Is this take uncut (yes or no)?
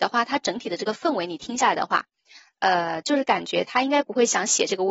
no